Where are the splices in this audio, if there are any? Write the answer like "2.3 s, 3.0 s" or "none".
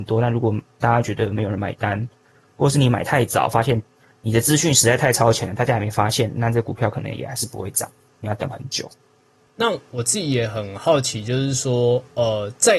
none